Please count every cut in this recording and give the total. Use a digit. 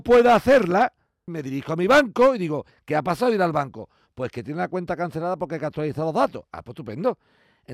1